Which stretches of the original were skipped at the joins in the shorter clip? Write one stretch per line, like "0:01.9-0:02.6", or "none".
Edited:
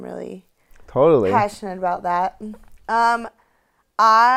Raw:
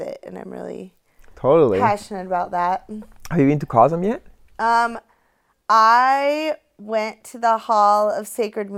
0:03.2-0:04.4